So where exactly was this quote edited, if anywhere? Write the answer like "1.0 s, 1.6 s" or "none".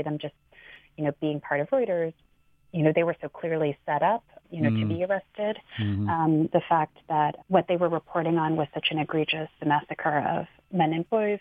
4.4 s